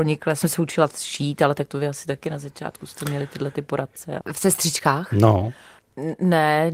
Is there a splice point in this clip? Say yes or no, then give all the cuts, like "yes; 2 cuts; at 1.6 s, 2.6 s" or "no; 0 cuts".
yes; 1 cut; at 4.2 s